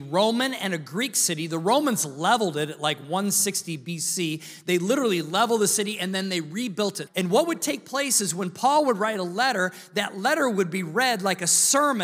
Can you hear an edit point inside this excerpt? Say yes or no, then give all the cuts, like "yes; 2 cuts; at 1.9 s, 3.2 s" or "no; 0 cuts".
yes; 1 cut; at 7.1 s